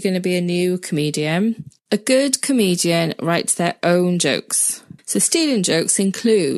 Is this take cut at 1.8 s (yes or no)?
no